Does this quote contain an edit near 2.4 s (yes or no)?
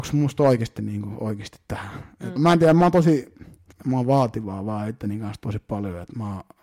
yes